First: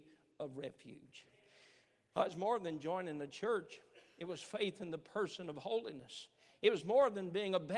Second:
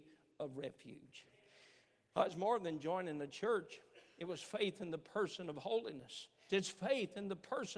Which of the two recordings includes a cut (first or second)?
second